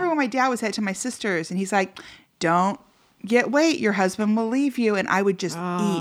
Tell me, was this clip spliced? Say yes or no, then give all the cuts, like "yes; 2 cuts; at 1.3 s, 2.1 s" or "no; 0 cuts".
no; 0 cuts